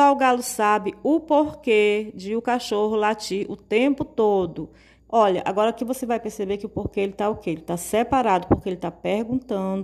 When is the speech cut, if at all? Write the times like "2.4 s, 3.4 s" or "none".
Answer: 5.0 s